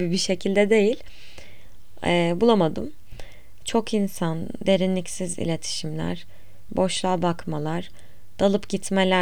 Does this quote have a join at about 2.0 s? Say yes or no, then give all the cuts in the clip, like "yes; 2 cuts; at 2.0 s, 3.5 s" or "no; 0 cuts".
no; 2 cuts; at 3.6 s, 6.7 s